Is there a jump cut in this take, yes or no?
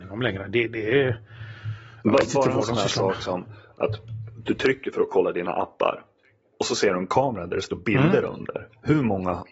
no